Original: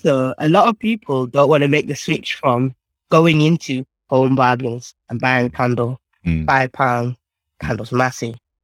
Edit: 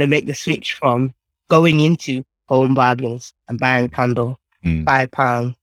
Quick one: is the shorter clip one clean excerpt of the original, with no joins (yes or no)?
yes